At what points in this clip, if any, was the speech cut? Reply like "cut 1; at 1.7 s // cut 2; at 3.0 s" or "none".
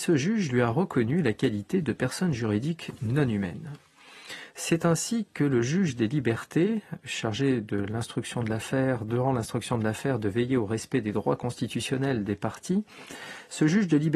cut 1; at 4.5 s